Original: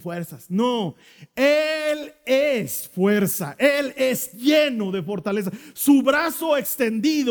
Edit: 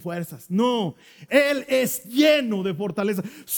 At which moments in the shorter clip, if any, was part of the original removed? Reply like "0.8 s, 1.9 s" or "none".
1.3 s

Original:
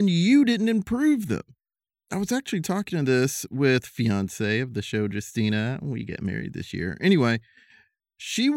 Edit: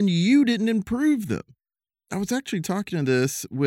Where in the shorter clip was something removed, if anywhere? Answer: none

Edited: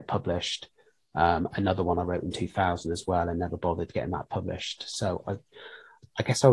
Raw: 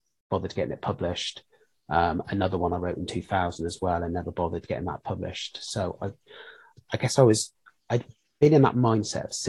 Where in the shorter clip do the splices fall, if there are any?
none

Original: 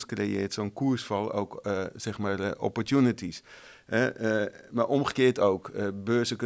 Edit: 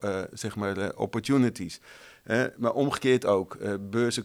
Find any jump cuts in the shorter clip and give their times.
2.5 s

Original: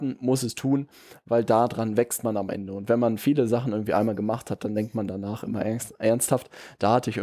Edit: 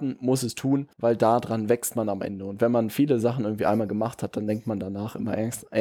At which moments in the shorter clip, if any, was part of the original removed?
0.9 s

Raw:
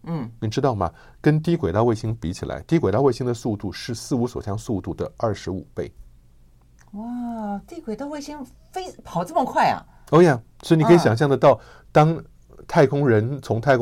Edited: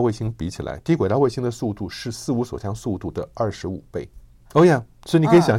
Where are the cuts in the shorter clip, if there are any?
4.5 s

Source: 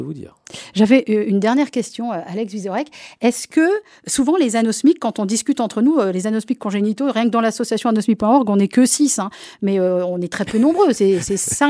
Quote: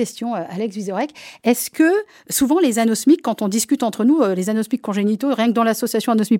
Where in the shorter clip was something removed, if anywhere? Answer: none

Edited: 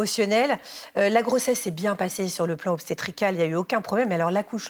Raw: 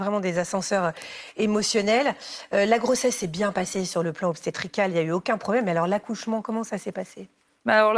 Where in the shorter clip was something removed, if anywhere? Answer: none

